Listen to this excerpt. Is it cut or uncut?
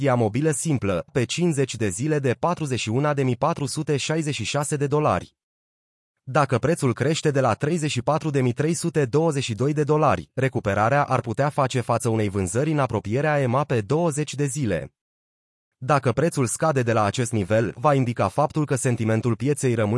cut